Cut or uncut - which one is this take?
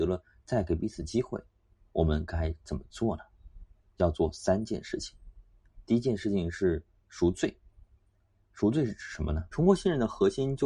cut